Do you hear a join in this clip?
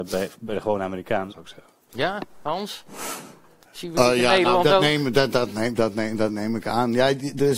yes; 1 cut; at 1.3 s

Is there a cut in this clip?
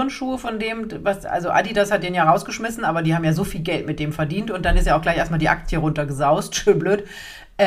no; 0 cuts

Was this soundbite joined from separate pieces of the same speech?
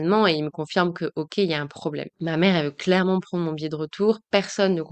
no; 0 cuts

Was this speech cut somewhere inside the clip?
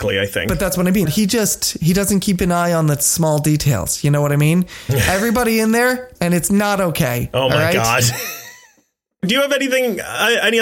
yes; 2 cuts; at 1.1 s, 6.2 s

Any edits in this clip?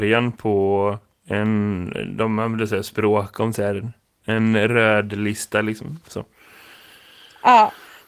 no; 0 cuts

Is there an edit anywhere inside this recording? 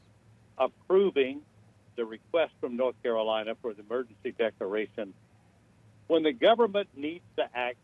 yes; 1 cut; at 1.9 s

